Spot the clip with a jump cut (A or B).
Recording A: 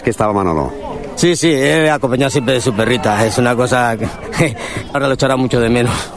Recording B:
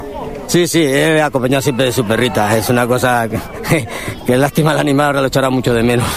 A